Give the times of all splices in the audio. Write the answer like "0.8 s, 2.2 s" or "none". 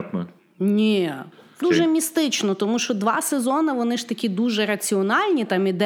1.6 s